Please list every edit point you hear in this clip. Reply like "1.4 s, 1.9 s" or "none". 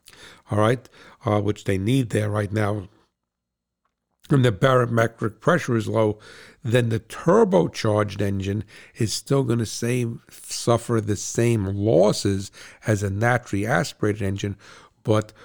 none